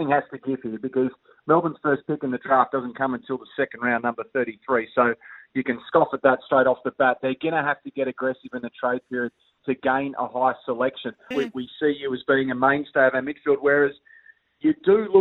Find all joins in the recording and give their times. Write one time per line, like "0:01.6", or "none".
0:11.3